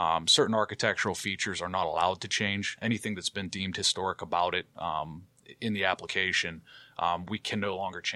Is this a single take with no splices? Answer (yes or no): yes